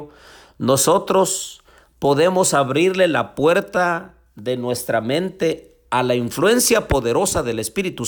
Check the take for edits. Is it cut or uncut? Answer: uncut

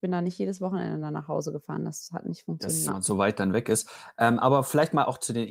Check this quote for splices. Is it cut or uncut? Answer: cut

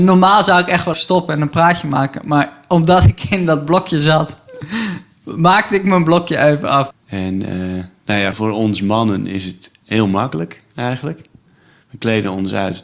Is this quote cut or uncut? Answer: cut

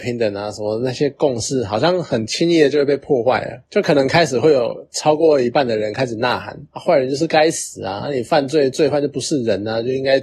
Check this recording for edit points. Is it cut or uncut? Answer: uncut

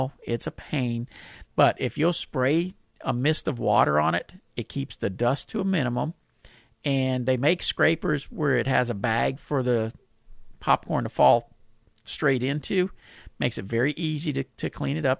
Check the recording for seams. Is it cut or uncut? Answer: uncut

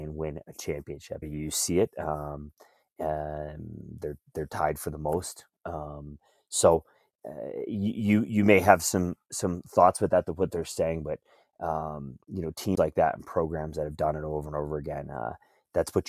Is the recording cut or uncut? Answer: cut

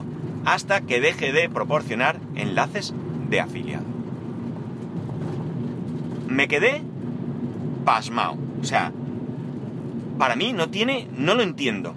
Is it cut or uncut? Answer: uncut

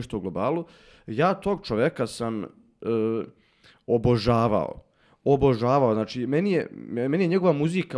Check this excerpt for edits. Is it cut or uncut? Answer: uncut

